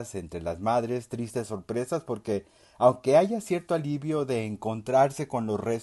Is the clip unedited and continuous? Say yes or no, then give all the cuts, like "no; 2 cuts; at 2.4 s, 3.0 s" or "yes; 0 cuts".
yes; 0 cuts